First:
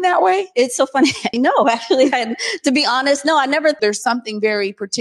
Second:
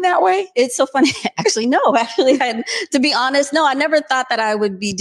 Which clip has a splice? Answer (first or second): first